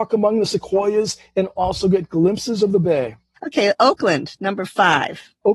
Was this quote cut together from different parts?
yes; 1 cut; at 3.4 s

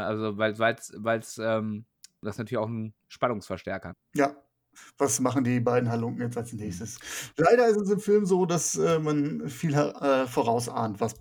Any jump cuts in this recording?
yes; 1 cut; at 3.9 s

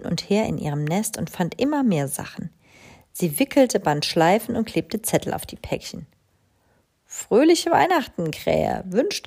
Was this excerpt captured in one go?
yes; 0 cuts

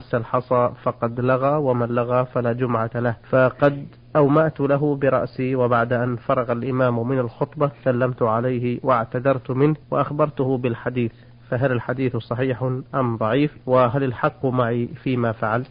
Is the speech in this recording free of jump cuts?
no; 3 cuts; at 3.2 s, 9.8 s, 13.6 s

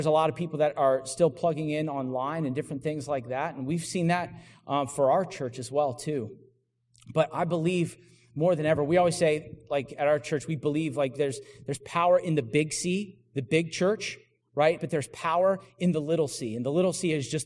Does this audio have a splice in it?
yes; 1 cut; at 14.8 s

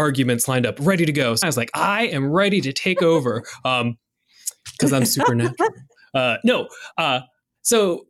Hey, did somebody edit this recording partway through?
yes; 1 cut; at 1.4 s

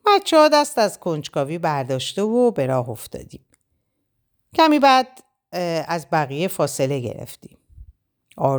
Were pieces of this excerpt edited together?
no; 0 cuts

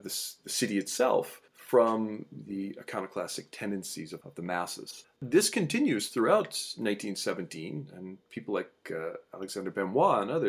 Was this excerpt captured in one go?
no; 1 cut; at 5.2 s

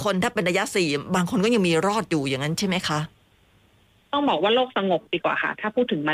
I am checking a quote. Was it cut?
no; 0 cuts

